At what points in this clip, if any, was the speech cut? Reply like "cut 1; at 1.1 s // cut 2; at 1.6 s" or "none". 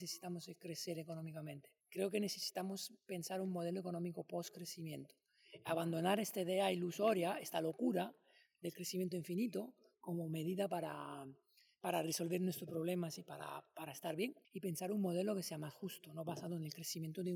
cut 1; at 1.8 s // cut 2; at 14.4 s